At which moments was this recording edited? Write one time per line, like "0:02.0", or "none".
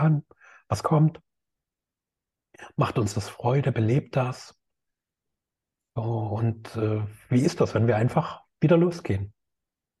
none